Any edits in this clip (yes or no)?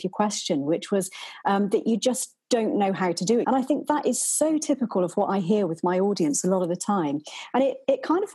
yes